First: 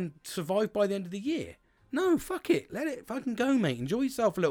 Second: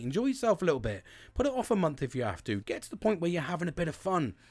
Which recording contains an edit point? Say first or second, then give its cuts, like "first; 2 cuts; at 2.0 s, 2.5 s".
second; 1 cut; at 2.6 s